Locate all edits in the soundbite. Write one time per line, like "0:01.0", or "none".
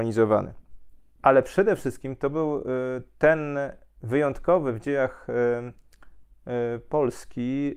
0:01.2